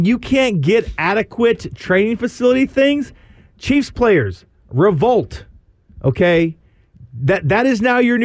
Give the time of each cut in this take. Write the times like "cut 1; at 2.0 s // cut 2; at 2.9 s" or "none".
none